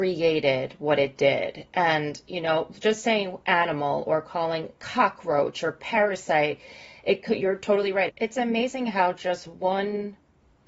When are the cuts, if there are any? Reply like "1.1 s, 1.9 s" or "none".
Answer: 8.1 s